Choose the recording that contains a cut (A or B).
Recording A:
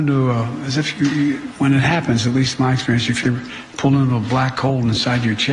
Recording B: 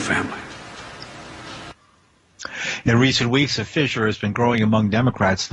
A